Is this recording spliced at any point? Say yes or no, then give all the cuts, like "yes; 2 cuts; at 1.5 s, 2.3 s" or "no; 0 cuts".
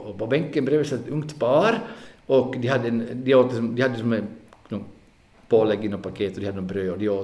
no; 0 cuts